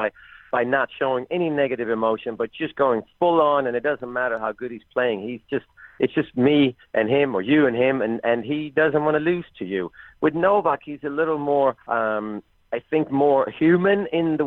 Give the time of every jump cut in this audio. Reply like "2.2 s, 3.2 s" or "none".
11.8 s